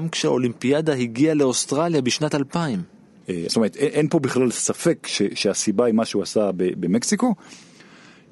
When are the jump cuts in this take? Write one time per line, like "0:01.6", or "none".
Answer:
0:03.5